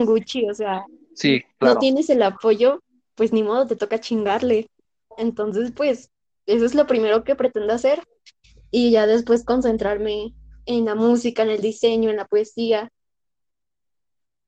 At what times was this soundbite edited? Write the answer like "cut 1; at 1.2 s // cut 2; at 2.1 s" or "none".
none